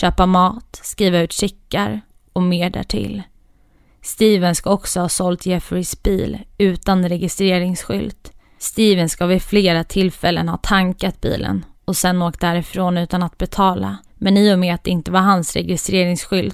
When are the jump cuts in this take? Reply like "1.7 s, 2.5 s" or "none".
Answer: 8.6 s, 14.1 s